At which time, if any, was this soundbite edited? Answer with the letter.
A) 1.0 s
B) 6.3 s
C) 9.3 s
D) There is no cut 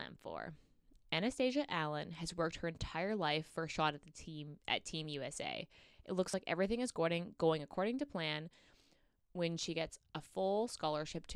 D